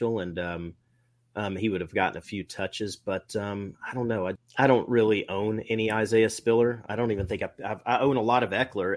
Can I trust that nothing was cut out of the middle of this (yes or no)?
no